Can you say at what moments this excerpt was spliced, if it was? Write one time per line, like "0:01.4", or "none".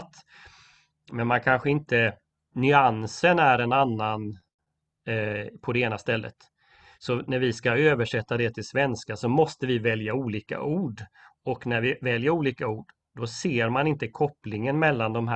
none